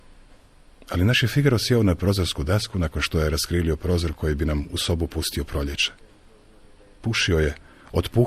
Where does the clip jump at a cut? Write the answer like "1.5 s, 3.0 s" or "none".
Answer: none